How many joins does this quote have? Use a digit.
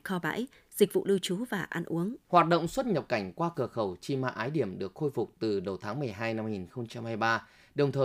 1